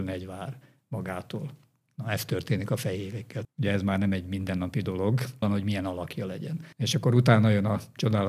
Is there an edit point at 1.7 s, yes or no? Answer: no